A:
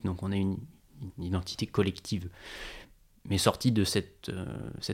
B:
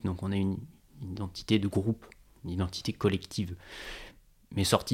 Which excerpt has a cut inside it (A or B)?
A